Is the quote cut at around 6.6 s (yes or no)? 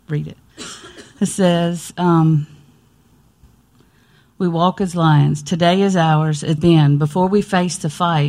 yes